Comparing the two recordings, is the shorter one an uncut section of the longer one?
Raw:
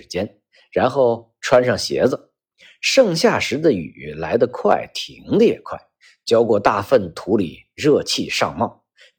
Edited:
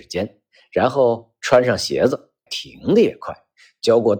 no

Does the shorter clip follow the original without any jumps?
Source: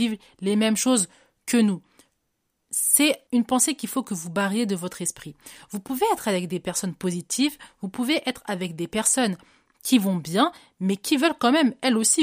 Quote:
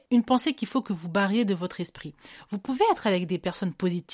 yes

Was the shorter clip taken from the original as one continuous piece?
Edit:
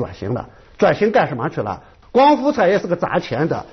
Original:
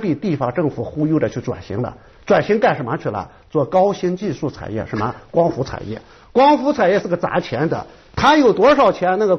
no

